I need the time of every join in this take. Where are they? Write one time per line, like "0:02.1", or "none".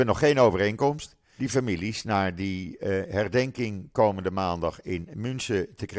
0:01.4